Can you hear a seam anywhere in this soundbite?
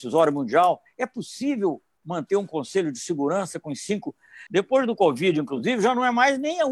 yes; 1 cut; at 4.5 s

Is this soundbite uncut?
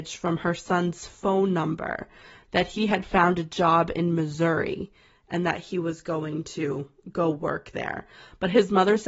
yes; 0 cuts

